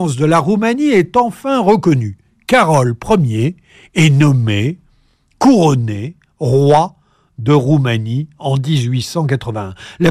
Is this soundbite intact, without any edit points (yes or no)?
yes